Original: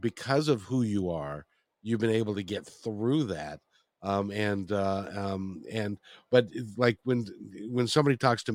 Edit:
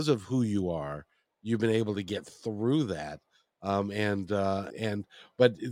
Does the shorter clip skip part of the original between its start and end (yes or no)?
yes